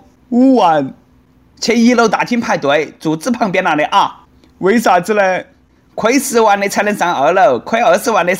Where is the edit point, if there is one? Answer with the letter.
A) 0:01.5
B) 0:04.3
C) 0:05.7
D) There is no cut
D